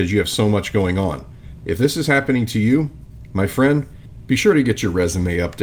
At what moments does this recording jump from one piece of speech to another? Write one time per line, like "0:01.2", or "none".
0:01.6